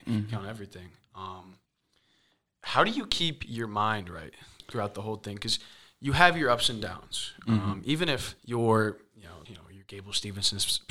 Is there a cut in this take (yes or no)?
yes